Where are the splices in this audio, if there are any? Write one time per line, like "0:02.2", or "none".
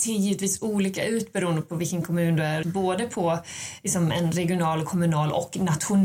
0:02.6